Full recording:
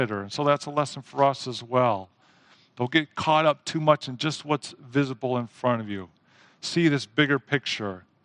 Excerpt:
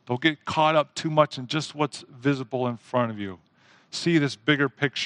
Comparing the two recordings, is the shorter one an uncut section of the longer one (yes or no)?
yes